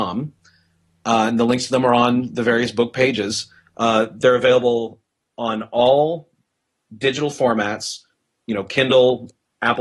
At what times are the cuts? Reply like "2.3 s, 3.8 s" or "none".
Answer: none